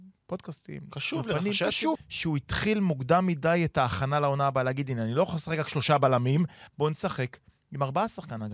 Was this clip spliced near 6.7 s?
yes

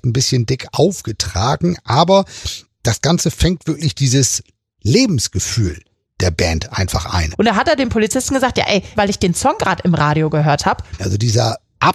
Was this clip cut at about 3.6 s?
no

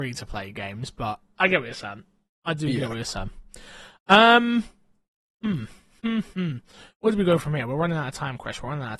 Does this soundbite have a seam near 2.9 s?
no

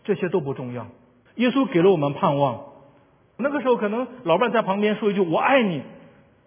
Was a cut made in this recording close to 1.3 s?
yes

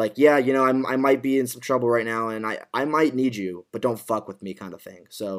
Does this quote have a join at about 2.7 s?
no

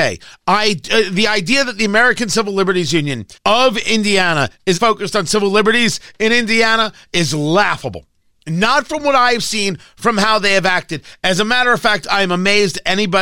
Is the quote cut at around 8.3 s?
no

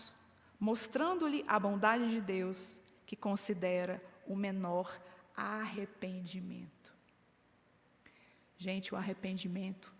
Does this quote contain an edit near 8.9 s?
no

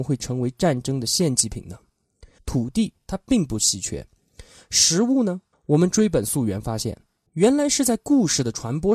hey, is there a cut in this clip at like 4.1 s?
no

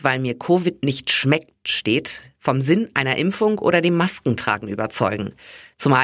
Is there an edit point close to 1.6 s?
no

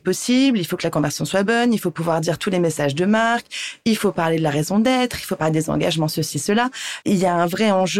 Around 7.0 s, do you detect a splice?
yes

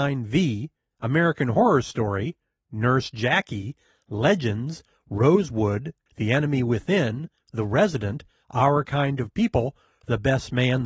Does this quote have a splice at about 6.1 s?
yes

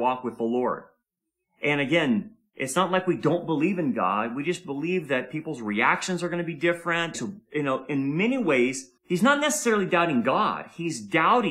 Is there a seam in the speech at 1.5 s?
no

